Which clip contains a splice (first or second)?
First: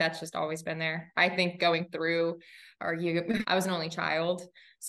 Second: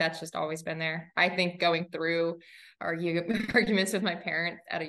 first